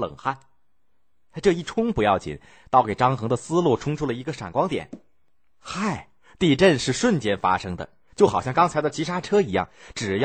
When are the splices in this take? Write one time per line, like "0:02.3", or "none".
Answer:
none